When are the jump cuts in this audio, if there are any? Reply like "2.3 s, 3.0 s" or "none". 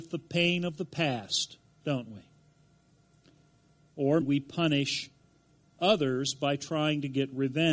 4.2 s

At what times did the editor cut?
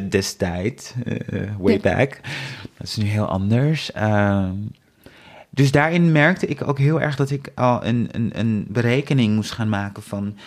none

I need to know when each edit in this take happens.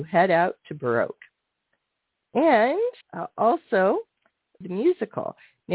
3.0 s, 4.6 s

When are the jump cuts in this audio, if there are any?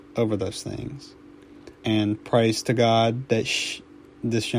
1.8 s

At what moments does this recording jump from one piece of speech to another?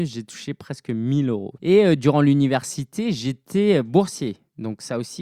1.6 s

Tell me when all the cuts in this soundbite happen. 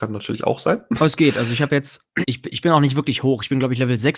2.2 s

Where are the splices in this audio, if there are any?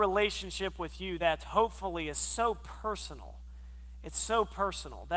none

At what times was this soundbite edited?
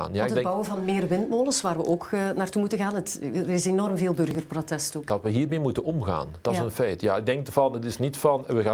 5.1 s

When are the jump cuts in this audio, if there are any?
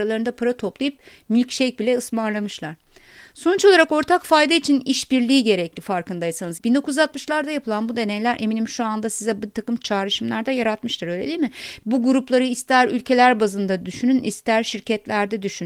6.6 s

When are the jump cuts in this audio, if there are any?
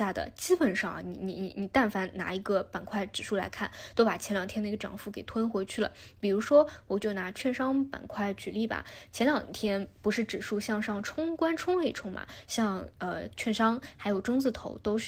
none

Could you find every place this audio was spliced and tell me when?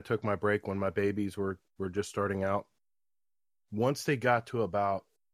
none

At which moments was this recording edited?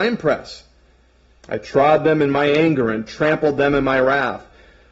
1.4 s

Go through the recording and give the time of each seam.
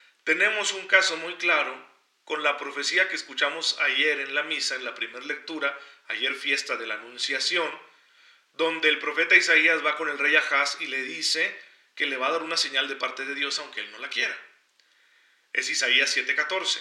none

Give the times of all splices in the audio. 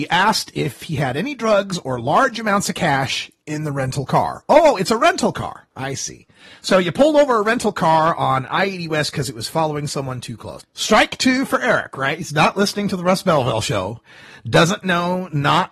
10.6 s

